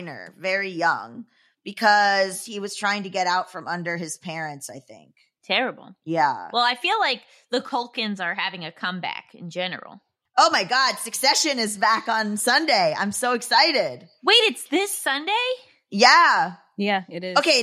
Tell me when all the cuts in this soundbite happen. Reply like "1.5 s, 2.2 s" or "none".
none